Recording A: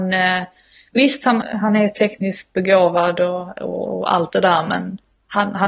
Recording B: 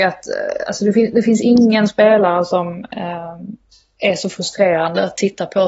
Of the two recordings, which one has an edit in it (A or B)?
A